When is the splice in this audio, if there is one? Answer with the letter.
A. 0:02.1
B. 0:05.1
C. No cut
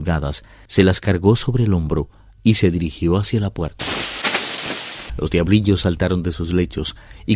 B